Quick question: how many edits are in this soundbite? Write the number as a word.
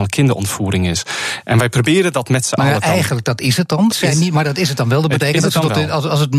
one